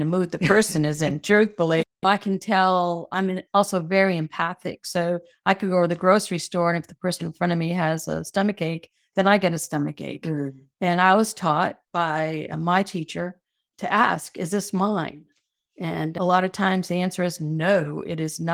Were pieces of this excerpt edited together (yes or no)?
no